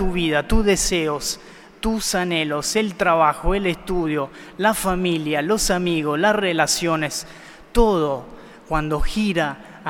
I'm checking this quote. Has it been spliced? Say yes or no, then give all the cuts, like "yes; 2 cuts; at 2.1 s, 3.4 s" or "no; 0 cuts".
no; 0 cuts